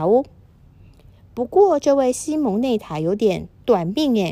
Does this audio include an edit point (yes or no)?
no